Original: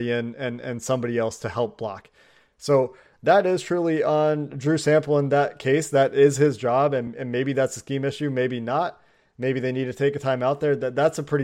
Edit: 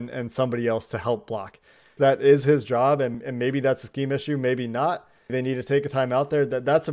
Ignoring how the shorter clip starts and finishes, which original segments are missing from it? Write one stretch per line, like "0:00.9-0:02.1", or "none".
0:02.5-0:05.9
0:09.2-0:09.6